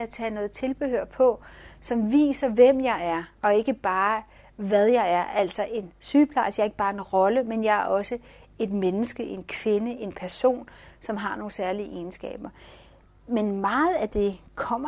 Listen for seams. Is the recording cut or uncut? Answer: uncut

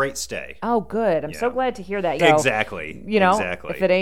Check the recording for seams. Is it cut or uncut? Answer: cut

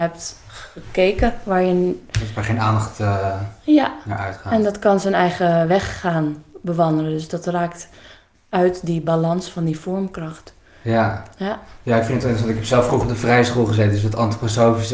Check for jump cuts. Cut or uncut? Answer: uncut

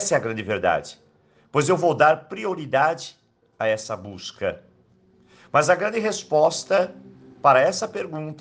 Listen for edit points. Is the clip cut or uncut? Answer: uncut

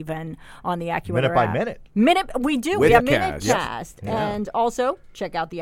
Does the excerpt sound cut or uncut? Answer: cut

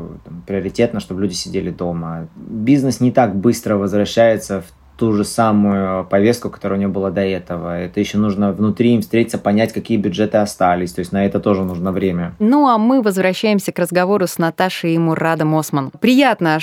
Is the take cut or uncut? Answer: cut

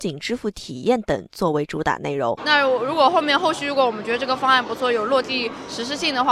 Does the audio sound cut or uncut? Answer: cut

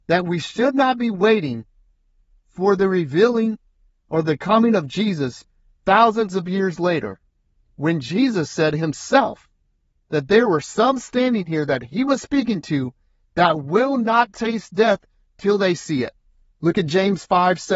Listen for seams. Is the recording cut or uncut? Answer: cut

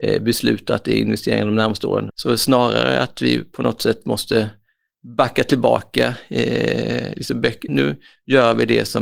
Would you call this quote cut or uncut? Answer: cut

